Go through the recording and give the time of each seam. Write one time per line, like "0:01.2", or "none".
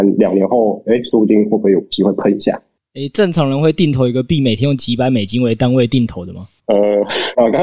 none